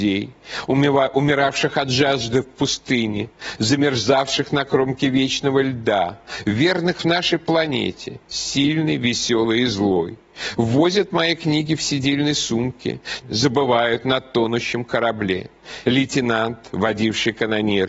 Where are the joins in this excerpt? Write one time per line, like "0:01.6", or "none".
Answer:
0:13.2
0:15.9